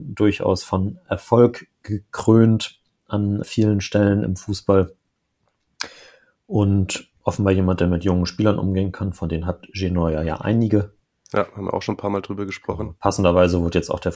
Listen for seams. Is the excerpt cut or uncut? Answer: cut